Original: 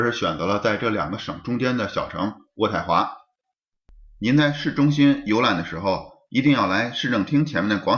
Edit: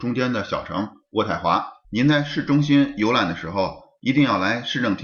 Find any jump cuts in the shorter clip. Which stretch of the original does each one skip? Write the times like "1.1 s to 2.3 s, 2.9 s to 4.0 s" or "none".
3.3 s to 4.1 s